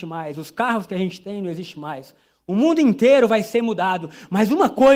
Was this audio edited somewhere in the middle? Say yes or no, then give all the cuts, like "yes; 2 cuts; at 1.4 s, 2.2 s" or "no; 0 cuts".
no; 0 cuts